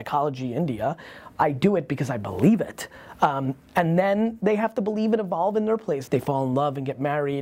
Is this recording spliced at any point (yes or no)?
yes